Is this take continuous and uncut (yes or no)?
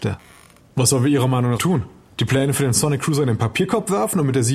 no